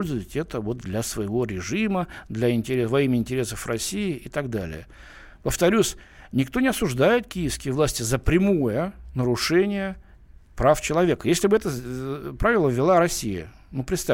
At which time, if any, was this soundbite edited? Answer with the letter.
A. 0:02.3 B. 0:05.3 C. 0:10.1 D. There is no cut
D